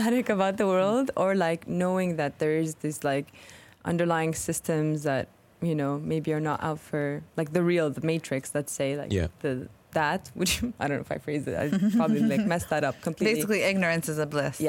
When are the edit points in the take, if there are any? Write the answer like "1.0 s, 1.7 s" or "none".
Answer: none